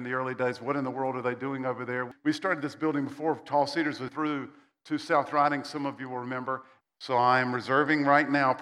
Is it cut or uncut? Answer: cut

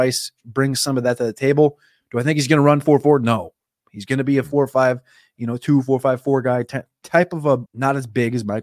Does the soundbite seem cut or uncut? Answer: cut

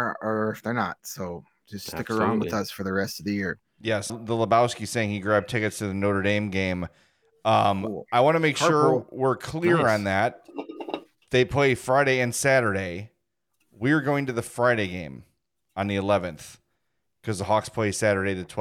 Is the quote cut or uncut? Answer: cut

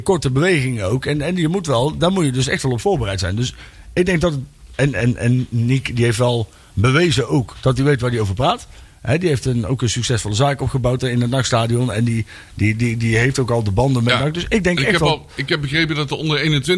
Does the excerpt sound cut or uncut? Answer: uncut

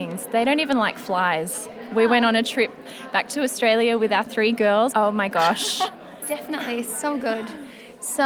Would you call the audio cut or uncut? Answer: cut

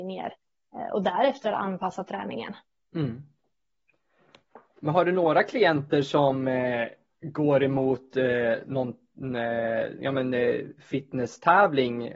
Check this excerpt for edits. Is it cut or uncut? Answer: uncut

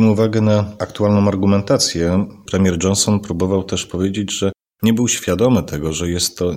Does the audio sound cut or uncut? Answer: uncut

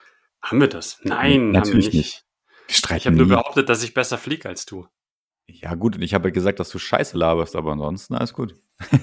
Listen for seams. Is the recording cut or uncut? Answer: uncut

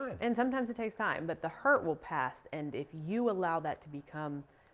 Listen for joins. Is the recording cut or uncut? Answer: uncut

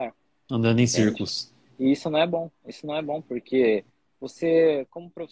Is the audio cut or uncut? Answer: uncut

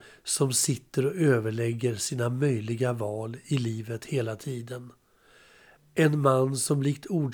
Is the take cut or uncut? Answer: uncut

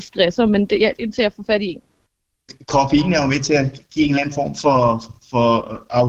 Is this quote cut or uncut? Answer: cut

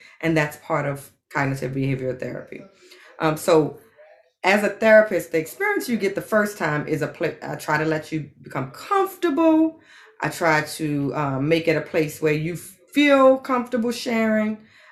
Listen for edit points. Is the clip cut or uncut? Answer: uncut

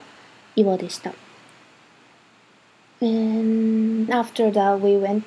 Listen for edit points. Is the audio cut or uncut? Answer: cut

